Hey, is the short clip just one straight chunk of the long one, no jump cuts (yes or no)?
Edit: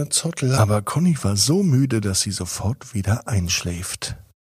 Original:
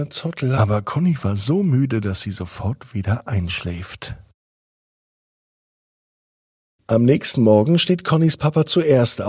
yes